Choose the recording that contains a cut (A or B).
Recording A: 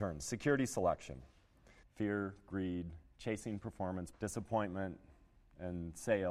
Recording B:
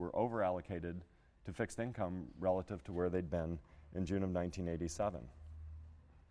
A